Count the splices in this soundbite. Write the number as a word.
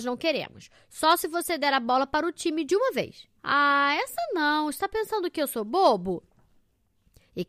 one